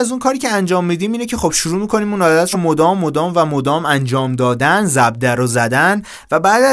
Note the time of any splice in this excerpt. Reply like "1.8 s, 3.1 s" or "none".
none